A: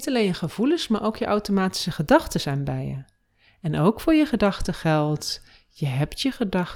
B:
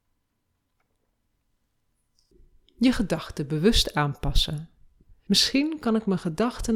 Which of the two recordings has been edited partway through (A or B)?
B